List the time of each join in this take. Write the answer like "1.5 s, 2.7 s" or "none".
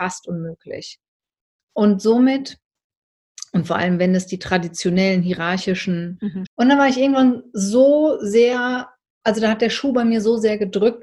6.5 s